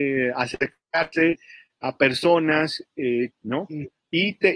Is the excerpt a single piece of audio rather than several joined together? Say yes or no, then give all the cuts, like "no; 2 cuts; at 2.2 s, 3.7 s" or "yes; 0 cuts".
no; 1 cut; at 3.3 s